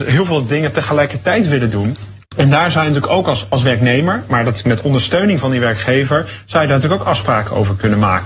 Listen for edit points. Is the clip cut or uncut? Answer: cut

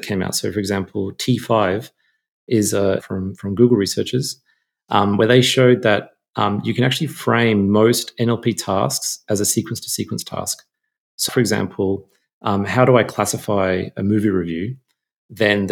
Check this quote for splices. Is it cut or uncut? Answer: cut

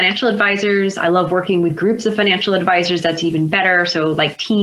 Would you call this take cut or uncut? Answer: uncut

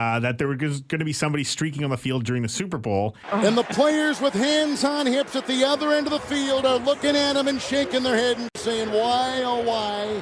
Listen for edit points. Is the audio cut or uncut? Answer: cut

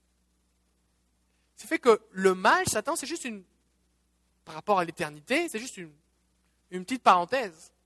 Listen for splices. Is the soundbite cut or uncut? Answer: uncut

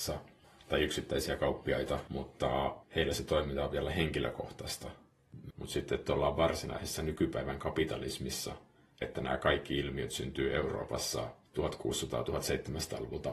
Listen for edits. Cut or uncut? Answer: cut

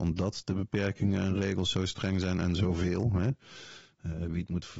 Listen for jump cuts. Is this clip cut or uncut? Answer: uncut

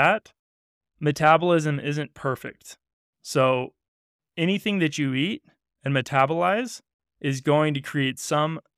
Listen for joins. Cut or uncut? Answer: uncut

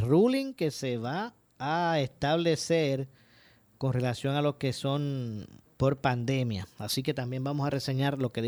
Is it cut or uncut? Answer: cut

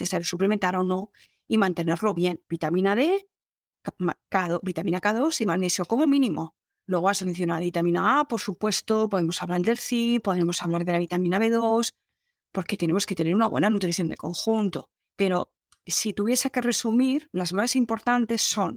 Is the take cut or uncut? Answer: cut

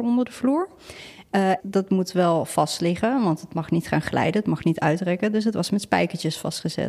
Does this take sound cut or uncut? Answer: cut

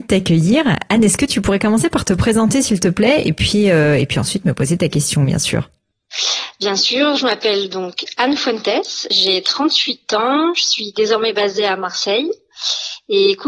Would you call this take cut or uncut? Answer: uncut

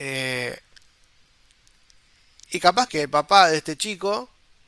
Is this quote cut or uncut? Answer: cut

